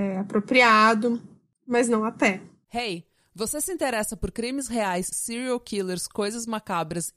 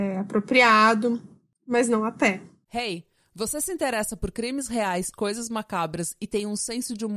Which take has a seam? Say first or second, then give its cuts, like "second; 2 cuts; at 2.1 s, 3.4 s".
second; 1 cut; at 5.1 s